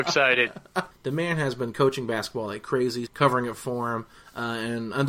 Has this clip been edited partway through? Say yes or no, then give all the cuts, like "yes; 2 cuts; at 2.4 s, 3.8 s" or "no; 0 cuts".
yes; 2 cuts; at 0.9 s, 3.1 s